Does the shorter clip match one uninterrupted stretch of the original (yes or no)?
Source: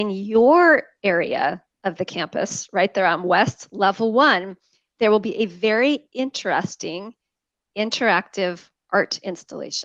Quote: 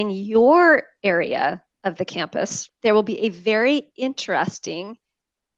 no